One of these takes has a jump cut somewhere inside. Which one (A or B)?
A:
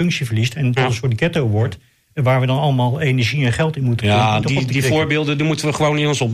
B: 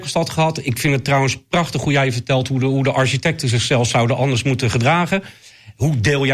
A